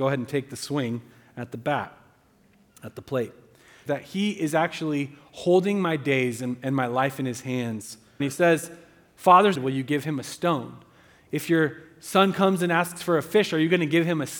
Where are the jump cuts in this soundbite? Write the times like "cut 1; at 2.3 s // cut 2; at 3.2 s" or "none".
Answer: cut 1; at 3.9 s // cut 2; at 8.2 s // cut 3; at 9.5 s